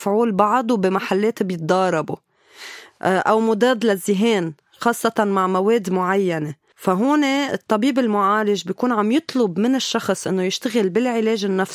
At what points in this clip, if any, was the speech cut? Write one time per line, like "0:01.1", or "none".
0:06.7

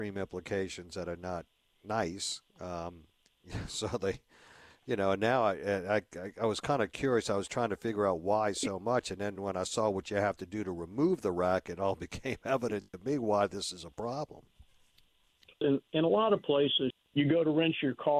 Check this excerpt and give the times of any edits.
0:15.6
0:16.9

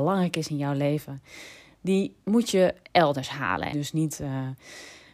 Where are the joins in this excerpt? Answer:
0:03.7

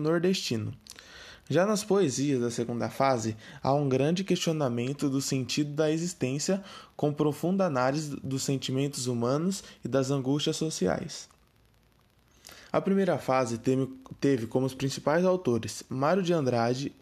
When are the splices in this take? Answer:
0:12.7

